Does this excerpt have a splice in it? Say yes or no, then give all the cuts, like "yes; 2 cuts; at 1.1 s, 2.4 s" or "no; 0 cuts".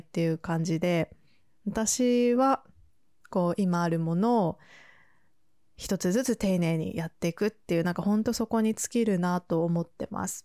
yes; 1 cut; at 3.2 s